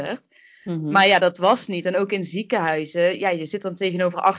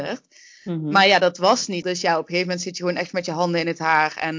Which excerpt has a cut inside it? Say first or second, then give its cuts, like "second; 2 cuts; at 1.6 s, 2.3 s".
second; 1 cut; at 1.8 s